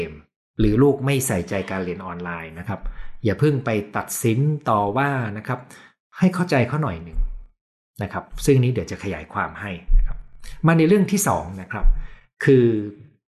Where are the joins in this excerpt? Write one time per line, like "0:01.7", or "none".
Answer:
none